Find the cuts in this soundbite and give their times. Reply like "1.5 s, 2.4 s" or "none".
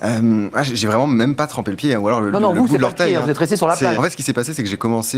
2.3 s, 3.9 s